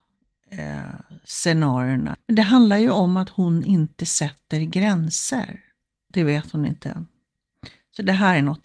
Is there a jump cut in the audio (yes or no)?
yes